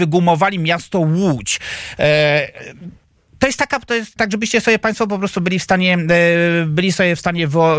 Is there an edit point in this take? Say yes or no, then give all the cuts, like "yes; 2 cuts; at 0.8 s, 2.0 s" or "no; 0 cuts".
yes; 1 cut; at 4.2 s